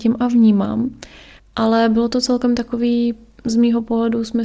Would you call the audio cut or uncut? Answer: cut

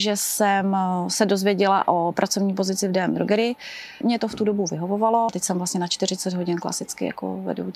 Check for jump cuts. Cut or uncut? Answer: cut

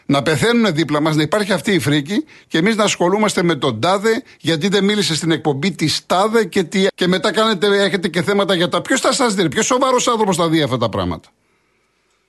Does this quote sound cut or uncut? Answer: cut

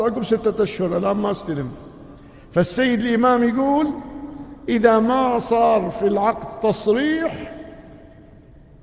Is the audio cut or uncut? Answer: uncut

